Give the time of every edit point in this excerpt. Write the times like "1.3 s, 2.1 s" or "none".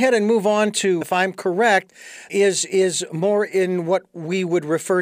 1.0 s, 2.3 s